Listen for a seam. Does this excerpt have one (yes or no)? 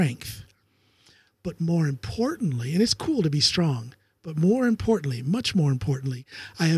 no